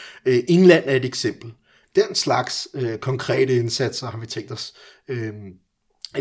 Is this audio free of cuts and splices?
no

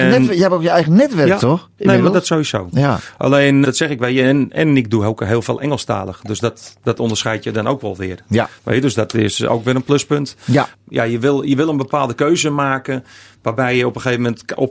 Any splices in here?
yes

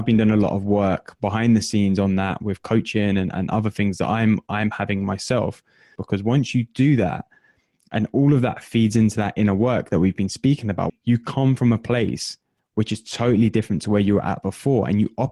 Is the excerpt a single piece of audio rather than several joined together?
no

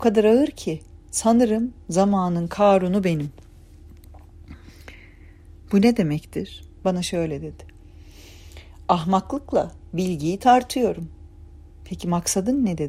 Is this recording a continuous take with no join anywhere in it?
no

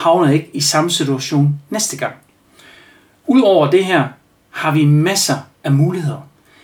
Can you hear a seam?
no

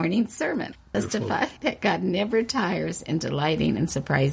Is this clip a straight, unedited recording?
no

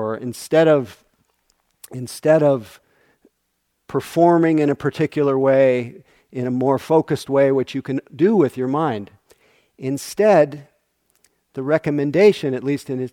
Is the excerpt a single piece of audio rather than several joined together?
yes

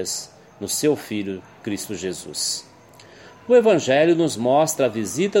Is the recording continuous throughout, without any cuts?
yes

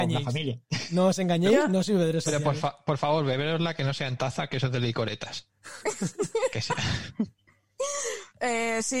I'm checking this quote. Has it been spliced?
no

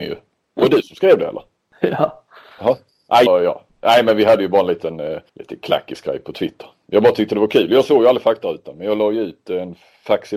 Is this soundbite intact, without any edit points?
no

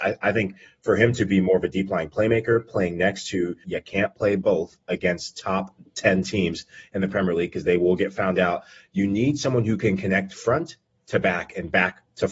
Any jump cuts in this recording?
yes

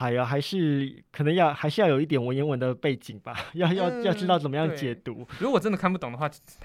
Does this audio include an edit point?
no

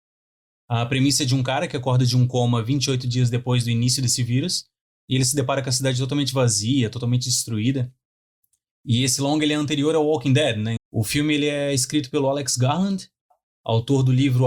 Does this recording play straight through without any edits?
no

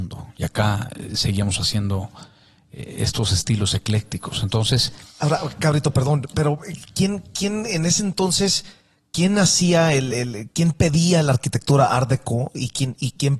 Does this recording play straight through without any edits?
yes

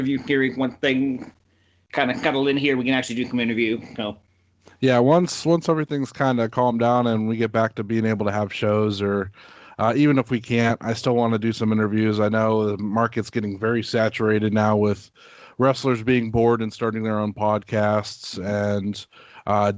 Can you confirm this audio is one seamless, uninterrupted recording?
yes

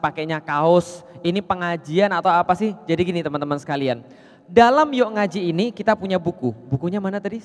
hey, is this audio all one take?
yes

